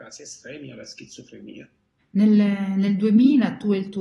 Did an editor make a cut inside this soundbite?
yes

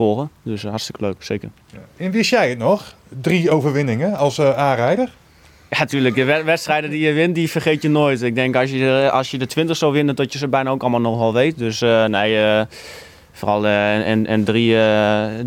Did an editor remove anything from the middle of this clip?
no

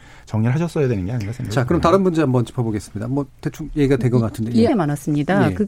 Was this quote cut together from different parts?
yes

